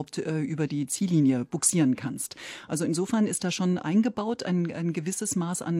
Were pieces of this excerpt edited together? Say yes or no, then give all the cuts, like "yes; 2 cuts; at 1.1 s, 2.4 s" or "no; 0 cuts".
no; 0 cuts